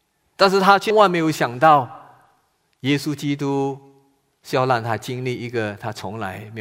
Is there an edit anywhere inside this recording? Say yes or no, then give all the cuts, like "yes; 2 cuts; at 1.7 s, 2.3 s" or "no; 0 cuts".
yes; 1 cut; at 0.9 s